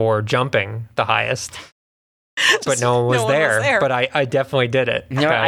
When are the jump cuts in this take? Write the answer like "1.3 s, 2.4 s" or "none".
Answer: none